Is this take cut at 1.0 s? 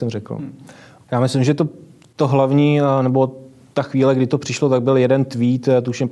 yes; 1 cut; at 1.0 s

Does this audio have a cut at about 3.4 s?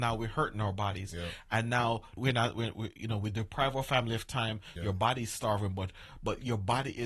no; 2 cuts; at 2.2 s, 4.8 s

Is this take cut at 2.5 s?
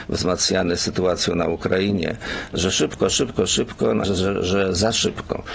no; 1 cut; at 4.0 s

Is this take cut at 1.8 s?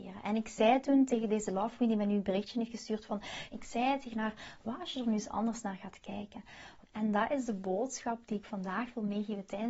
no; 2 cuts; at 3.5 s, 6.8 s

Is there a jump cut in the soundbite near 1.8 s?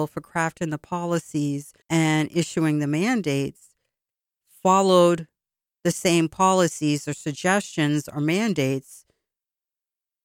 yes; 1 cut; at 1.8 s

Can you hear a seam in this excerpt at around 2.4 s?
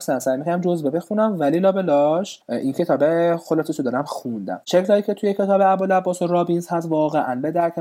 yes; 1 cut; at 2.4 s

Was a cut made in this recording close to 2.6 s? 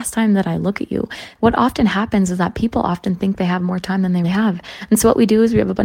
no; 2 cuts; at 1.4 s, 4.2 s

